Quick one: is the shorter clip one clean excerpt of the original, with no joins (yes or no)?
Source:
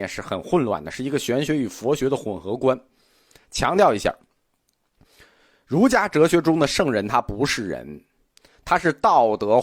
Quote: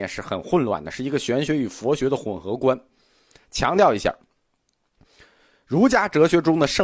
yes